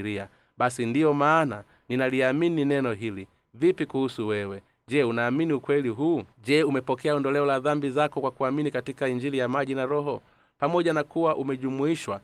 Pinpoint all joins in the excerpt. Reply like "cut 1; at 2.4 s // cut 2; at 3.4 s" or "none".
cut 1; at 6.3 s